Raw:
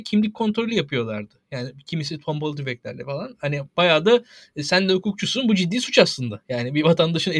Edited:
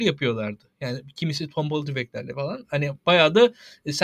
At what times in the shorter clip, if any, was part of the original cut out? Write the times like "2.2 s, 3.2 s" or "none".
none